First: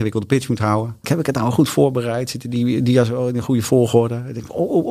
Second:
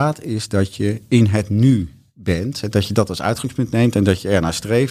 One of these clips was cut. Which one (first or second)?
first